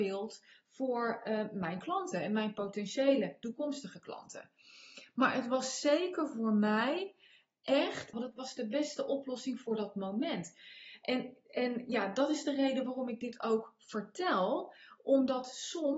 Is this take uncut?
no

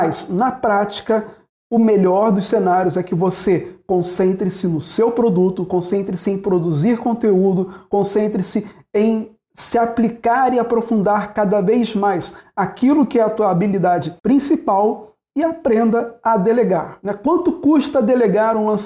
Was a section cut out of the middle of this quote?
yes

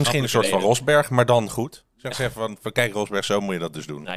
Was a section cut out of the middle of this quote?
yes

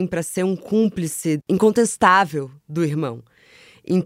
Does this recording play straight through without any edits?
yes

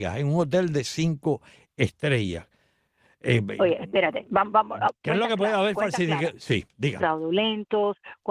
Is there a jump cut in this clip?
yes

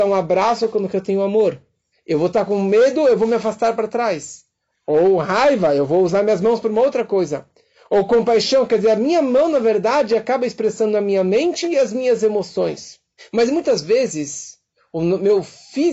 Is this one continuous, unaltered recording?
yes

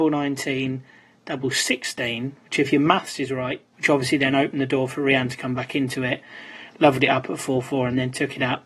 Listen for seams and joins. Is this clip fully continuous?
no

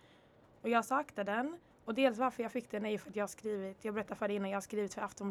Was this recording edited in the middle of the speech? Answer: no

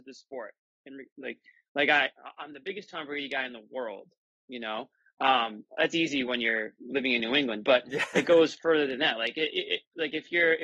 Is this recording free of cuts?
yes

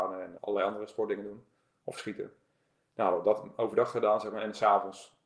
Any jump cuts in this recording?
no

